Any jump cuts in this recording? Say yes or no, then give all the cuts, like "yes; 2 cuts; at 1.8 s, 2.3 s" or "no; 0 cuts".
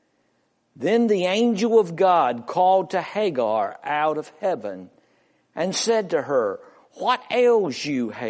no; 0 cuts